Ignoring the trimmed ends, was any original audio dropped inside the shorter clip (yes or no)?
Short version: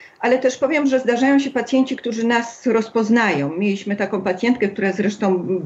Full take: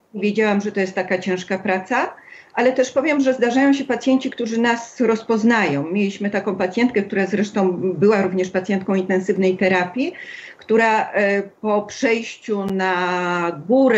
no